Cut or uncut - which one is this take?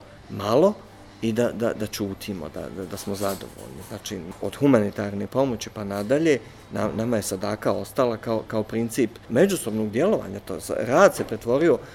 uncut